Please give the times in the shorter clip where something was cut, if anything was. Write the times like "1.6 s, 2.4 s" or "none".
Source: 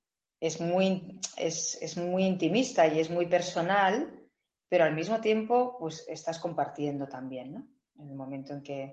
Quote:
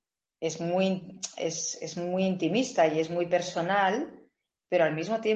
none